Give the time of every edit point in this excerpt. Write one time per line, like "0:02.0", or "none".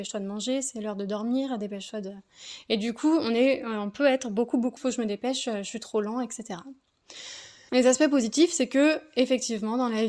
0:04.8
0:07.7